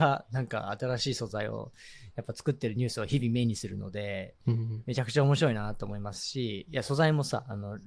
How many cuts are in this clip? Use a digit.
0